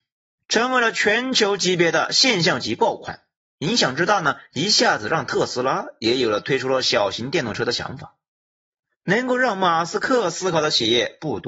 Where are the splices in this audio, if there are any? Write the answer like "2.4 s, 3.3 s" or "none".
none